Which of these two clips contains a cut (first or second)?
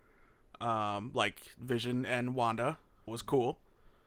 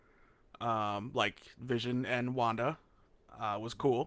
first